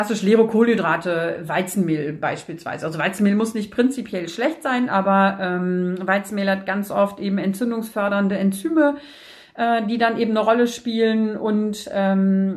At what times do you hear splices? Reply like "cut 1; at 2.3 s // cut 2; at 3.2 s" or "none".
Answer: none